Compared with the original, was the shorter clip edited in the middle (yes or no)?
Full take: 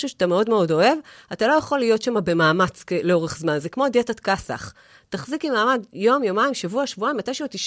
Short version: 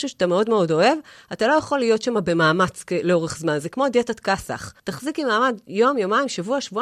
yes